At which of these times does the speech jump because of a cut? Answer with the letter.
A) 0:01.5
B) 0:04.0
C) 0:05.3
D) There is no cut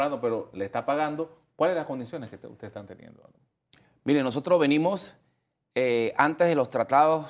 D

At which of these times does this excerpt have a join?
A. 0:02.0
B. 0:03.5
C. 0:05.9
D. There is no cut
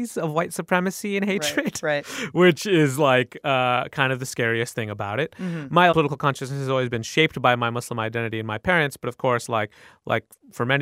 C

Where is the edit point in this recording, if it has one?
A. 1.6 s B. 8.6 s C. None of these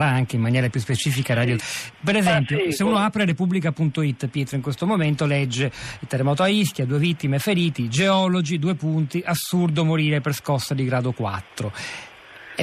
A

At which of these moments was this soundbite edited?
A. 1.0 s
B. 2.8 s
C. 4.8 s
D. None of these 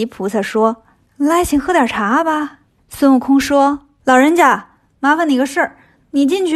B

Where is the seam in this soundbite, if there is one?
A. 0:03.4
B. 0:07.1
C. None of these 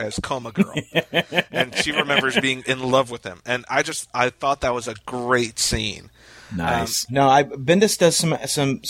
B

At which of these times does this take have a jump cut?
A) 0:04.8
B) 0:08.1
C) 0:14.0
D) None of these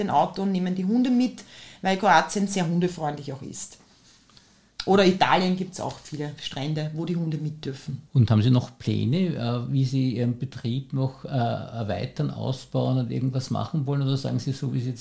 B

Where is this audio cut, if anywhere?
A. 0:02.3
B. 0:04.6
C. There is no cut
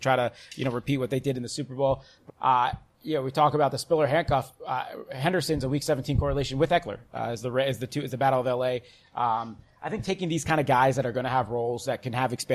A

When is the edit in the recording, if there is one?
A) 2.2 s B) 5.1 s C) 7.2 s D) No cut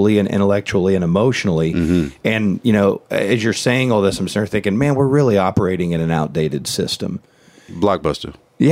D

